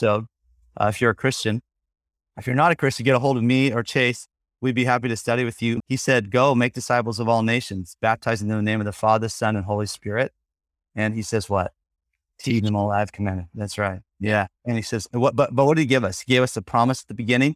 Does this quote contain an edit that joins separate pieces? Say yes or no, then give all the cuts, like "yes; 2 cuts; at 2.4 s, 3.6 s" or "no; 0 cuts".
yes; 1 cut; at 5.8 s